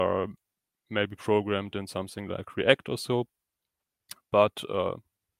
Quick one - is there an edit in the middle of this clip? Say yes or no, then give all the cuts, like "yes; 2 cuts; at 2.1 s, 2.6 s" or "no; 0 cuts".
no; 0 cuts